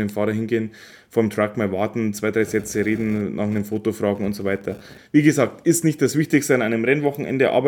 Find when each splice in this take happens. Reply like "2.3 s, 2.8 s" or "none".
5.0 s